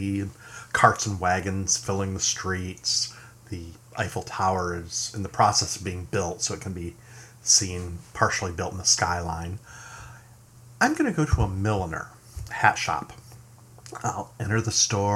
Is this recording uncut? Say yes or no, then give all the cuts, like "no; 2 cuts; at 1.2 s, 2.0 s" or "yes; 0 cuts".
no; 1 cut; at 12.5 s